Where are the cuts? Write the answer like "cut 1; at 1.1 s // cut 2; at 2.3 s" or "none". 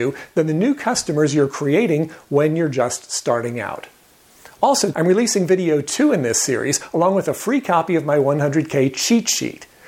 cut 1; at 4.9 s